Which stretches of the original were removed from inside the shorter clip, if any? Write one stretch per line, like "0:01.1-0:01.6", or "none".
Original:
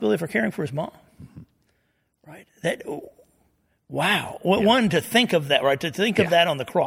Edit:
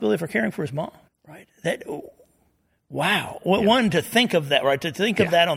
0:01.1-0:02.1